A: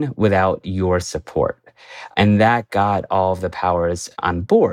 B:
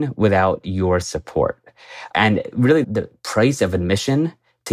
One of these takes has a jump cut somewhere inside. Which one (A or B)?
B